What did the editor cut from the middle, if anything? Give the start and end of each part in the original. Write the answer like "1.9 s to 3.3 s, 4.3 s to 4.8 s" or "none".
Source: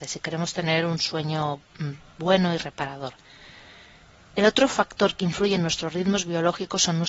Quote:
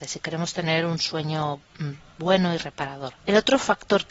3.2 s to 4.3 s